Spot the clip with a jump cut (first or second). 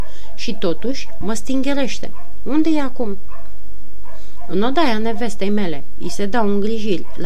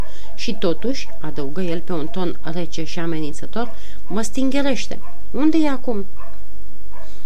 first